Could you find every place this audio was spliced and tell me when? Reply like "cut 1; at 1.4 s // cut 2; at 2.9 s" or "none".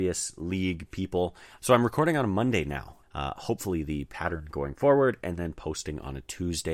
cut 1; at 1.6 s // cut 2; at 3.0 s